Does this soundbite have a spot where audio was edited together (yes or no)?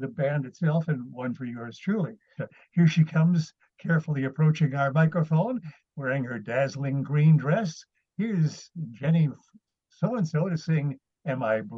yes